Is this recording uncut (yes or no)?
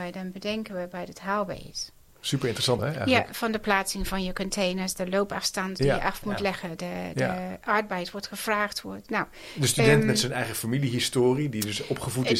no